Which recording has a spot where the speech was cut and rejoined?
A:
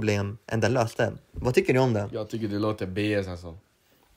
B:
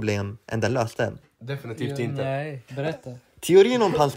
B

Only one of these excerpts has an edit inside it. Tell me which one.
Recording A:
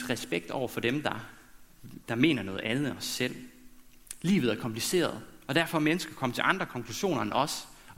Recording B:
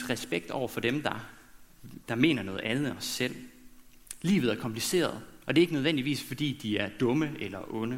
B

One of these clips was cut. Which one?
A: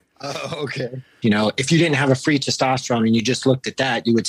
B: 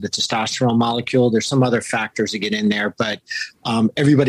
A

